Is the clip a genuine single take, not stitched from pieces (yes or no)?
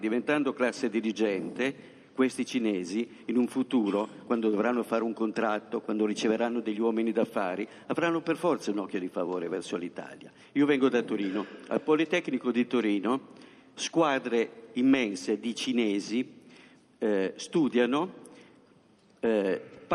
no